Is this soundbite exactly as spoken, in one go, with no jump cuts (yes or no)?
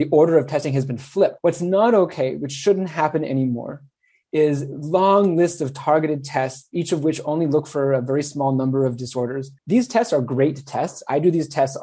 no